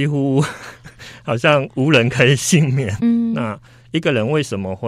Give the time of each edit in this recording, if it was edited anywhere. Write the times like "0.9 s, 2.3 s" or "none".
3.0 s